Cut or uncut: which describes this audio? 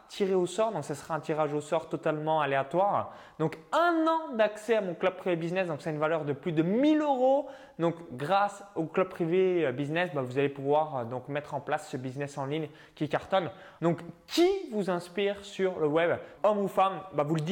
cut